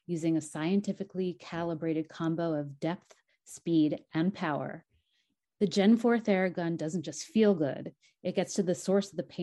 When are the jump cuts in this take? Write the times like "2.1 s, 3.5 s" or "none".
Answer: 5.4 s